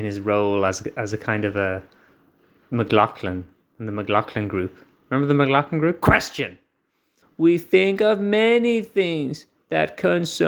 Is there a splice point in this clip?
yes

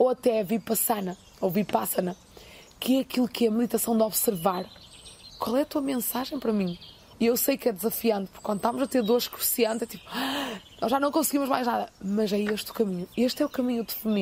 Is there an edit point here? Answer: yes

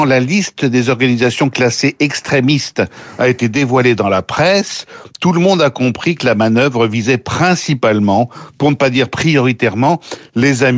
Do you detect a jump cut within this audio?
no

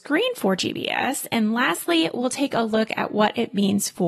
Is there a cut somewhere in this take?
no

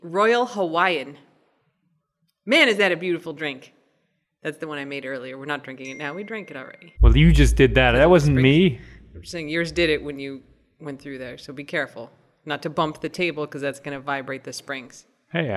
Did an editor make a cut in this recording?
yes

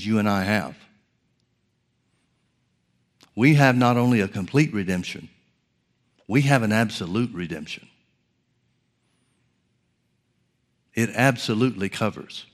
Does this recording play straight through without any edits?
yes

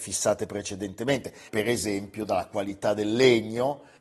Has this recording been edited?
yes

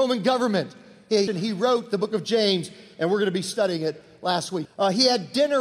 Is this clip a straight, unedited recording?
no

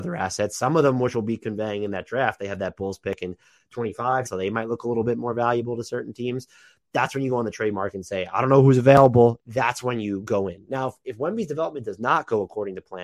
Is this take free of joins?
no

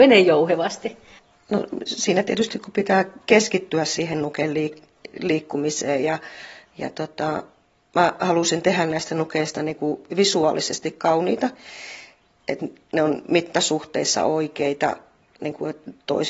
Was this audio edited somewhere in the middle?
no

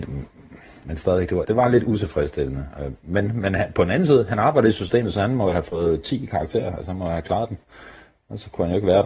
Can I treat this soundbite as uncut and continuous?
no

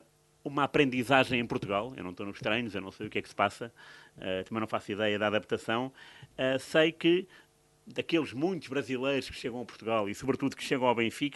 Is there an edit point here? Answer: no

